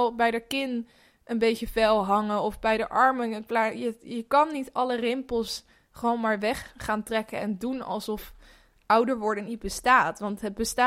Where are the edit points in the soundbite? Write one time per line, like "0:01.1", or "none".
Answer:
none